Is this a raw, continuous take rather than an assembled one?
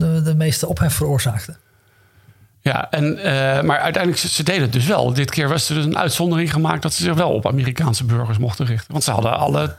yes; 0 cuts

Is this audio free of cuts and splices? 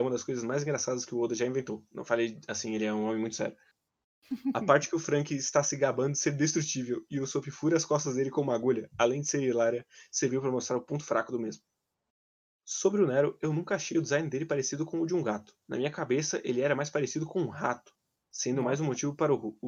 yes; 0 cuts

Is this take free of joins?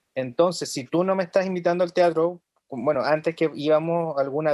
yes; 0 cuts

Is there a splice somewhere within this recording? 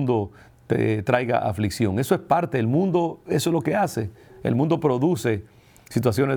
no; 0 cuts

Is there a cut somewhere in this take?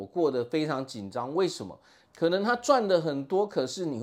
yes; 1 cut; at 2.0 s

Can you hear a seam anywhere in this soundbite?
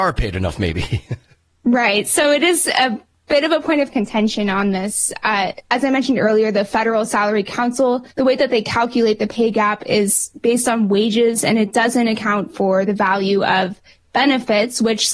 yes; 1 cut; at 8.1 s

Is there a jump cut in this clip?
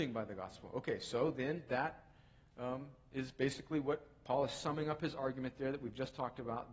no; 0 cuts

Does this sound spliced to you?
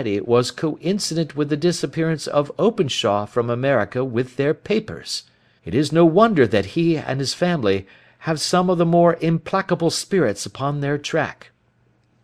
yes; 1 cut; at 5.6 s

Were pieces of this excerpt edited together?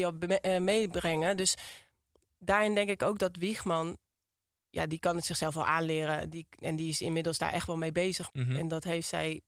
yes; 1 cut; at 8.3 s

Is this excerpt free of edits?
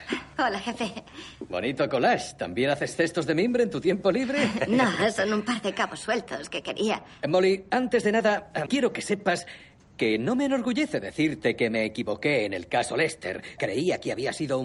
no; 2 cuts; at 8.7 s, 13.6 s

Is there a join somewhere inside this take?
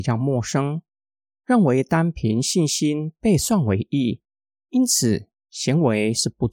no; 0 cuts

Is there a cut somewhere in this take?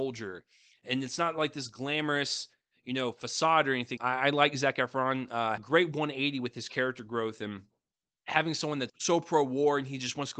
yes; 3 cuts; at 4.0 s, 5.6 s, 8.9 s

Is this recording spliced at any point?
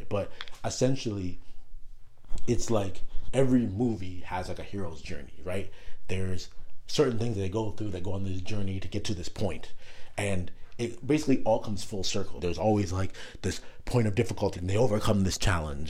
yes; 2 cuts; at 12.4 s, 14.5 s

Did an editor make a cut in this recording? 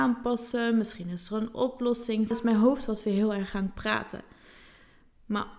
yes; 1 cut; at 2.3 s

